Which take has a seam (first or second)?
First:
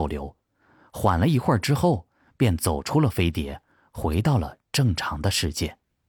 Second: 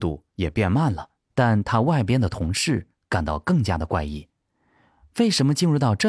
second